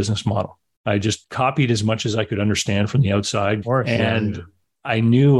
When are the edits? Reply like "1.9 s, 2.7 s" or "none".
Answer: 3.6 s